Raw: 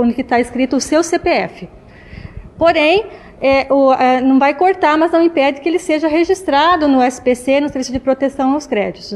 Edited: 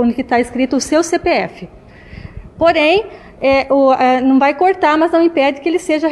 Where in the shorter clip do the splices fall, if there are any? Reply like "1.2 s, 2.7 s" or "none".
none

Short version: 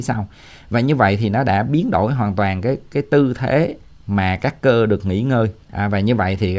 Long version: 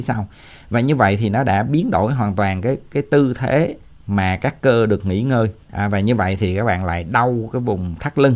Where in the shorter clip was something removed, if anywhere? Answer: none

